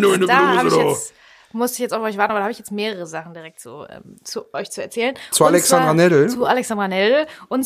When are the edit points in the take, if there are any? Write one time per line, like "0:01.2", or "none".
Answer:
none